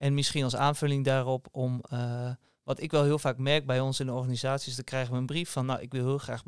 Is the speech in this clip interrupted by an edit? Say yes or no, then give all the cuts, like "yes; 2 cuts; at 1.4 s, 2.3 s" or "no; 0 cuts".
no; 0 cuts